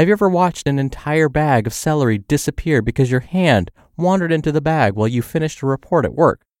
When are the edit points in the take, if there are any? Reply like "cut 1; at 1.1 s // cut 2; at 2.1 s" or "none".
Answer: none